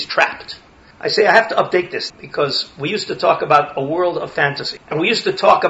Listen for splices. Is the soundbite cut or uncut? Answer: cut